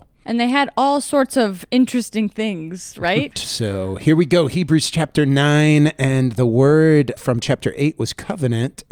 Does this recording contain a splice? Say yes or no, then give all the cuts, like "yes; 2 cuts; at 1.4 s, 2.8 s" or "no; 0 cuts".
yes; 1 cut; at 3.3 s